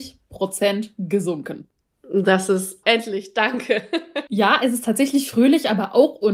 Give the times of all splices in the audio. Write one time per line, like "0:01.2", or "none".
0:02.8
0:04.3

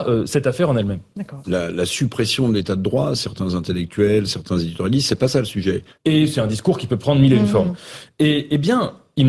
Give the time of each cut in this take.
0:01.4
0:06.0

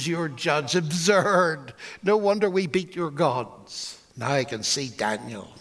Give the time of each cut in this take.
0:04.1

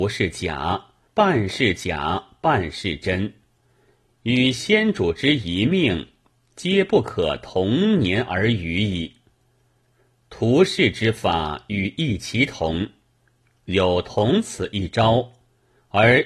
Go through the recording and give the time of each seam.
0:01.1

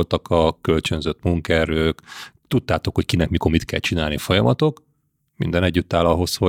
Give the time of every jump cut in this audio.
none

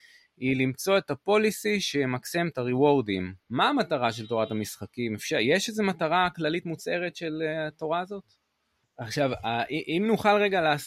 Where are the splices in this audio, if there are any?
0:03.4
0:08.8

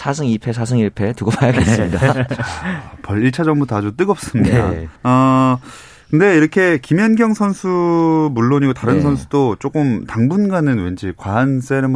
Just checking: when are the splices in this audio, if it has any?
0:05.0

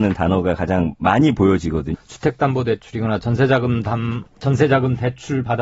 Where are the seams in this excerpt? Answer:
0:01.9

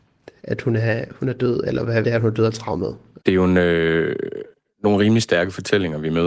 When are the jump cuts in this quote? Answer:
0:02.0
0:03.2

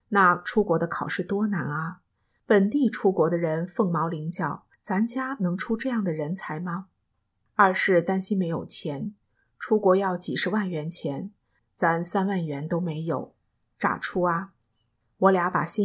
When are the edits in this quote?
none

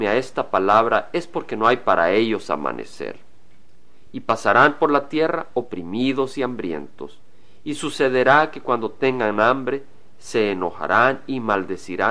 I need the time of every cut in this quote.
none

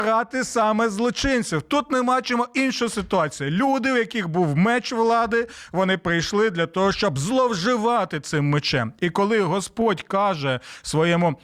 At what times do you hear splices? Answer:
none

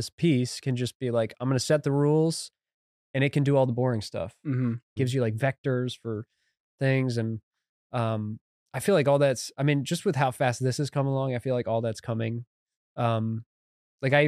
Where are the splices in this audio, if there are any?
0:05.0

